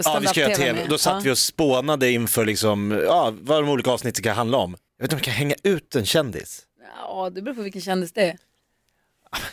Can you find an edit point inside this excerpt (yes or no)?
yes